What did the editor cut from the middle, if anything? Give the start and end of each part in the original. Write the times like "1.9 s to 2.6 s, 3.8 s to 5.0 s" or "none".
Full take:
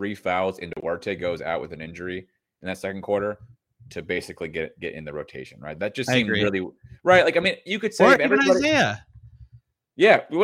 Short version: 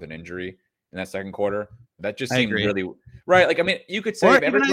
3.7 s to 5.8 s